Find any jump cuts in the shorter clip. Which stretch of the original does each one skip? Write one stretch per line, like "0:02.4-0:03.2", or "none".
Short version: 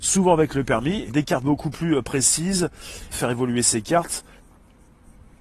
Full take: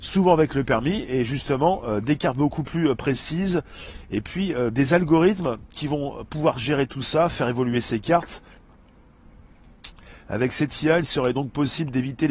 0:01.1-0:02.0
0:04.0-0:07.3